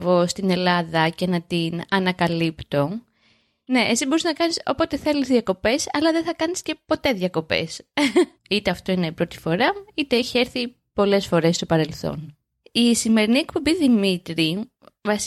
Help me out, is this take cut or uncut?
cut